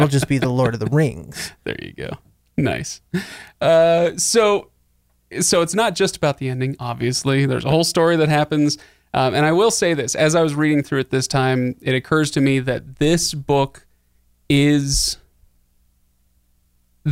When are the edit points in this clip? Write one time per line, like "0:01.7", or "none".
none